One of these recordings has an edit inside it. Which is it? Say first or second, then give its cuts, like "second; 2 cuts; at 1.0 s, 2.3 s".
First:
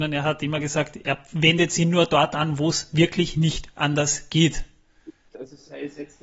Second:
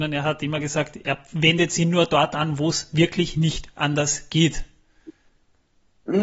first; 1 cut; at 5.3 s